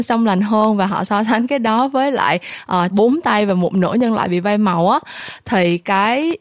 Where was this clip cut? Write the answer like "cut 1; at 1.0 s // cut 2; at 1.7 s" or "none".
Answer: cut 1; at 2.9 s